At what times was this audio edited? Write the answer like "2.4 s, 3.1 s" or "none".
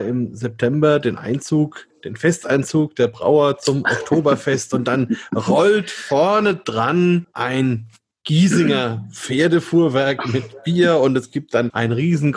none